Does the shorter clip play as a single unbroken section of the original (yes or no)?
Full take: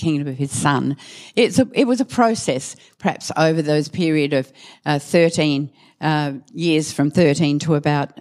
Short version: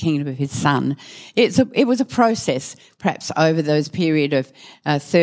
yes